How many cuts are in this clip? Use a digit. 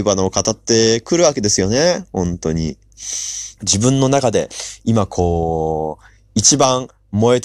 1